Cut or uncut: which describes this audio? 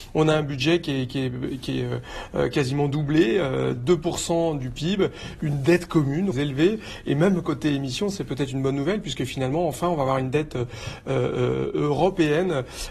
cut